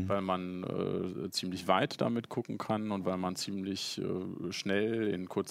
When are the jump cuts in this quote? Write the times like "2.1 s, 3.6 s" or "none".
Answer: none